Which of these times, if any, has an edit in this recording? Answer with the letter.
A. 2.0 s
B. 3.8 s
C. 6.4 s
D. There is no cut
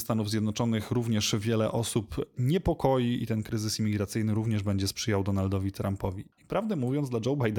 C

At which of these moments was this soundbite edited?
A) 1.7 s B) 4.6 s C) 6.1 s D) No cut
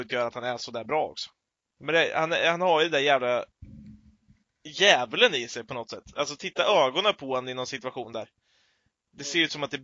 A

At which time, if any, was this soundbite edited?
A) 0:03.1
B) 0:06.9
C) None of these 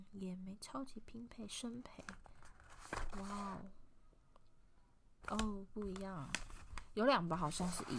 C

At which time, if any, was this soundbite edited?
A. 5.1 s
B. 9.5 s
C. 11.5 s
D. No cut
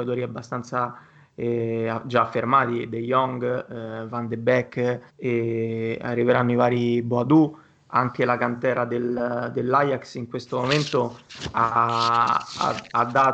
A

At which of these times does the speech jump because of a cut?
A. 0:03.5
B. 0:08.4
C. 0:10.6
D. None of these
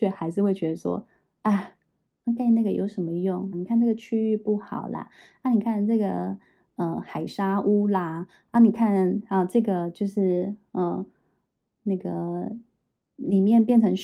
A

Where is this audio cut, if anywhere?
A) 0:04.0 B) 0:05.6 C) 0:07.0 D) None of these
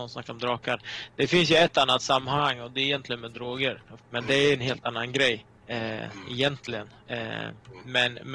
A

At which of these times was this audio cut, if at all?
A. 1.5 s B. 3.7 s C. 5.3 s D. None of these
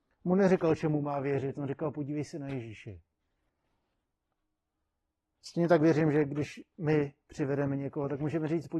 D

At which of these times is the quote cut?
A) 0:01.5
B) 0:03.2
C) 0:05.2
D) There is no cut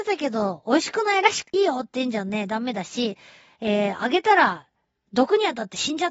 A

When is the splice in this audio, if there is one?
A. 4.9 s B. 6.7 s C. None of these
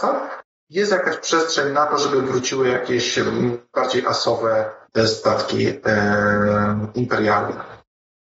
A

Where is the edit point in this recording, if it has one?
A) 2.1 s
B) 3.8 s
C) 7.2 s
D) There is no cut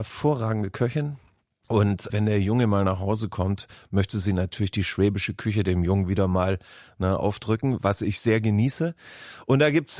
A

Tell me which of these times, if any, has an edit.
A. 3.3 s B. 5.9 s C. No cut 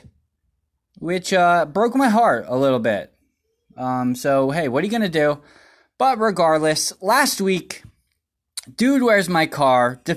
C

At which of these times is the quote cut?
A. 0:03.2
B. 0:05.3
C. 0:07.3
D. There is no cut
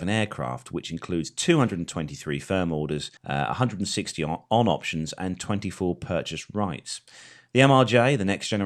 A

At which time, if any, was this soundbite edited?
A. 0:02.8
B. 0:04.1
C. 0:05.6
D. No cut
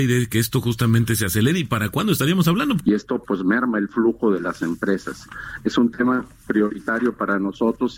A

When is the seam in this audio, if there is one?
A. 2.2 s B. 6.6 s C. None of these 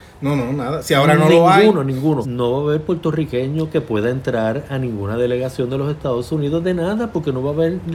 A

